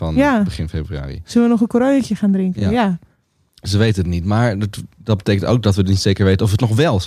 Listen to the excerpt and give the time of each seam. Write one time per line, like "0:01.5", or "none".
none